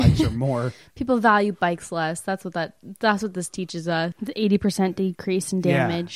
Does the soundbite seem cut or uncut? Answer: cut